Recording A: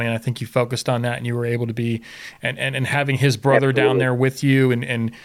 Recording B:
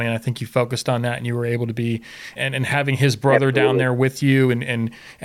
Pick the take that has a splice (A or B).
B